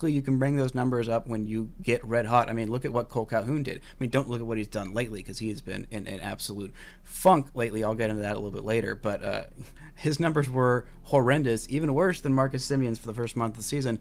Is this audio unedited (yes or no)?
yes